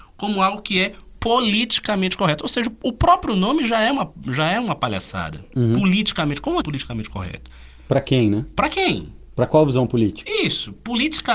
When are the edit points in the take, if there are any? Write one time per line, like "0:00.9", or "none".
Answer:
0:06.6